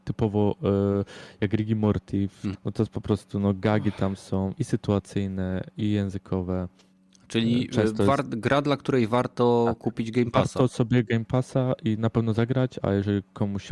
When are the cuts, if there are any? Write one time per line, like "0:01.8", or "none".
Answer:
0:02.5
0:12.8